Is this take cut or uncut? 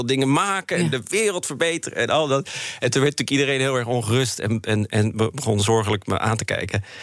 uncut